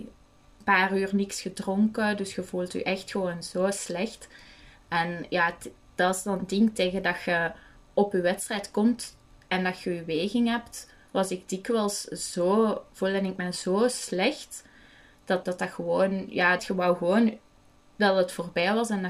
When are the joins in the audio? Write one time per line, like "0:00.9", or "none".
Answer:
0:15.4
0:16.6